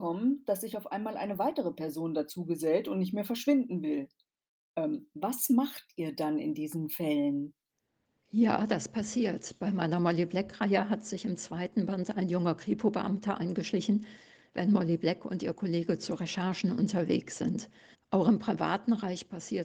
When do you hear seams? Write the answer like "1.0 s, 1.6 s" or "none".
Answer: 14.5 s, 17.9 s